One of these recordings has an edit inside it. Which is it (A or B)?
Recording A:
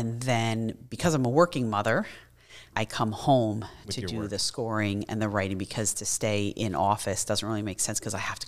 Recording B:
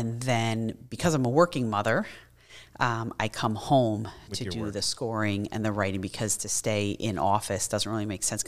A